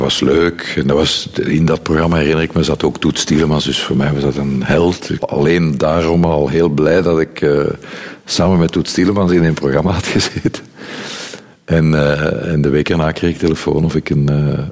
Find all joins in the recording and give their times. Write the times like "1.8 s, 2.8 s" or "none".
5.2 s